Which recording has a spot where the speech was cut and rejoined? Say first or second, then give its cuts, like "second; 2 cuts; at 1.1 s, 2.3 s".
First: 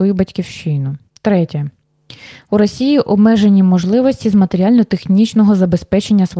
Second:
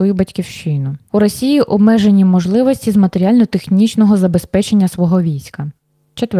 second; 1 cut; at 1.1 s